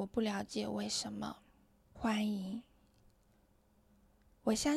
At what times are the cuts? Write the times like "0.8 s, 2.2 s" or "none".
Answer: 2.0 s